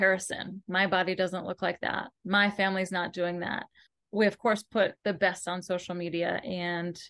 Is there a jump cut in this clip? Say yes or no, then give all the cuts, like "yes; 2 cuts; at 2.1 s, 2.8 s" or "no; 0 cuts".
no; 0 cuts